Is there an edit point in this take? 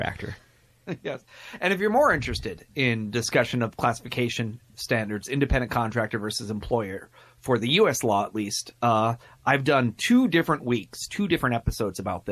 no; 0 cuts

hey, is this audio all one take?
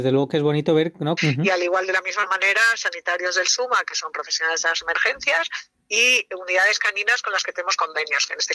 no; 1 cut; at 1.2 s

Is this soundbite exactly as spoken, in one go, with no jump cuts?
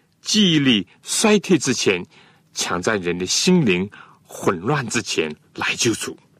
yes; 0 cuts

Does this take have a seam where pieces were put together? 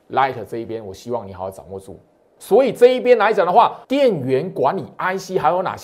yes; 2 cuts; at 2.4 s, 3.8 s

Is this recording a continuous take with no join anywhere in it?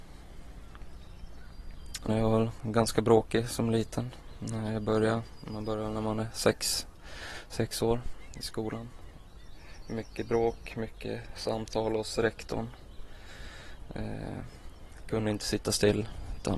no; 1 cut; at 2.1 s

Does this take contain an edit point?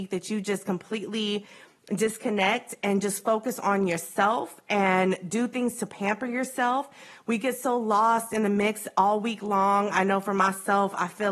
no; 0 cuts

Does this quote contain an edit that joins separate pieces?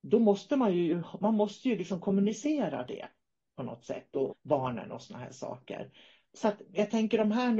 yes; 2 cuts; at 4.3 s, 6.2 s

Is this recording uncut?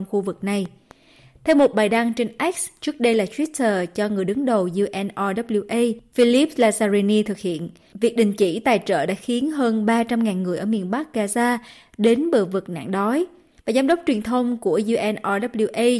yes; 0 cuts

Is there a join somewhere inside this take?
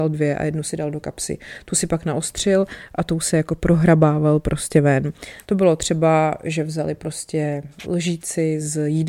yes; 2 cuts; at 5.4 s, 7.8 s

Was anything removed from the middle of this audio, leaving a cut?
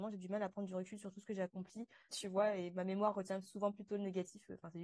yes; 1 cut; at 2.1 s

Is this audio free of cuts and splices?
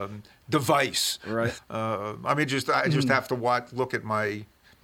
no; 1 cut; at 1.6 s

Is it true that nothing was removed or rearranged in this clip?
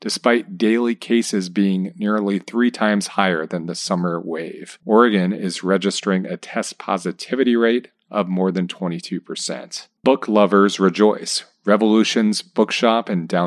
no; 1 cut; at 10.0 s

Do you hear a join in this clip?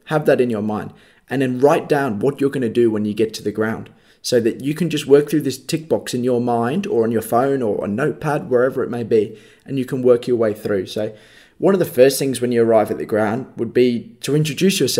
no; 0 cuts

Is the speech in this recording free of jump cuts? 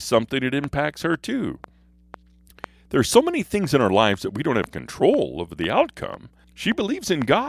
no; 1 cut; at 6.4 s

